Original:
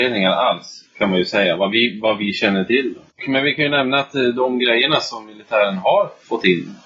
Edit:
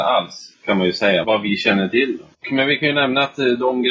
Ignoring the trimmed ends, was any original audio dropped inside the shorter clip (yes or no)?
yes